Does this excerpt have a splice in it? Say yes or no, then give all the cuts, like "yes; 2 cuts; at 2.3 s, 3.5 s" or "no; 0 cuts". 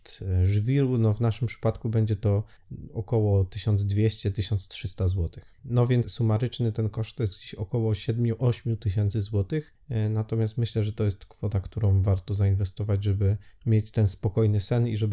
yes; 1 cut; at 6.0 s